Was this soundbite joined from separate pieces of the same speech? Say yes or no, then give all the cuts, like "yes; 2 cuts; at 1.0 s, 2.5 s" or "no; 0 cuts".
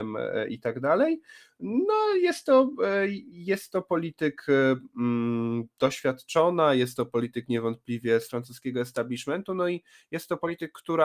no; 0 cuts